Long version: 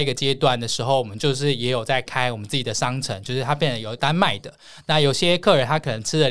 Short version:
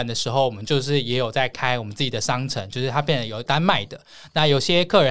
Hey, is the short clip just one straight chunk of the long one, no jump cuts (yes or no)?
yes